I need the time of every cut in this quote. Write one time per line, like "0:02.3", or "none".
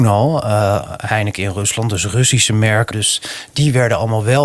0:02.9